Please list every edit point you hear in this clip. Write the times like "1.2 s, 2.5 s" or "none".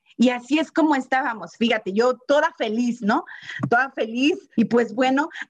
4.5 s